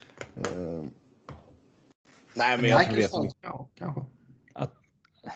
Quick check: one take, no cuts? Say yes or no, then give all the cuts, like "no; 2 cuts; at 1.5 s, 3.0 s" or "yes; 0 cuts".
no; 1 cut; at 3.3 s